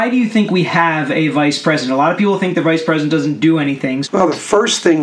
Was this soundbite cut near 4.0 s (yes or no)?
yes